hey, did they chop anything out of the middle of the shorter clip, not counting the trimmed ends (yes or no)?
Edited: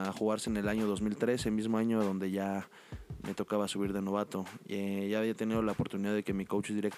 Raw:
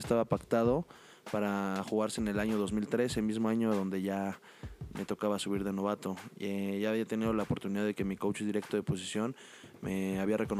no